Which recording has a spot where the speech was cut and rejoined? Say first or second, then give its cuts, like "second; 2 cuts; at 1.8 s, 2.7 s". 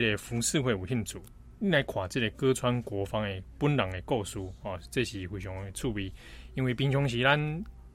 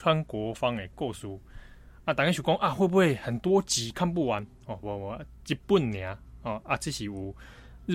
second; 1 cut; at 4.8 s